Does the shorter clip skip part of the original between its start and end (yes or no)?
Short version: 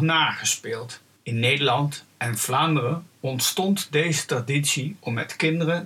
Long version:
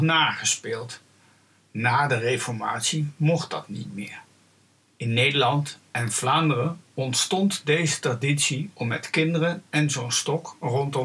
yes